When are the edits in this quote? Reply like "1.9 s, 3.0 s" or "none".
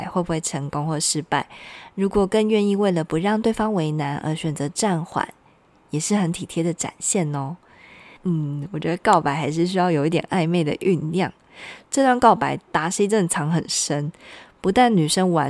8.2 s, 11.8 s